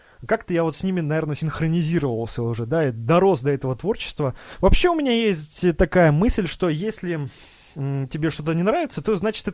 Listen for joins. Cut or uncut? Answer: uncut